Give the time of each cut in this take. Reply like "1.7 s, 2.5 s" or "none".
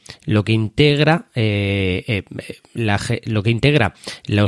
none